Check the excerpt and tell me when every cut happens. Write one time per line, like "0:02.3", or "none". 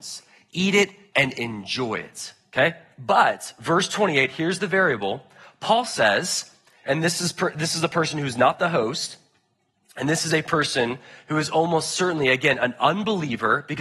0:01.1
0:06.9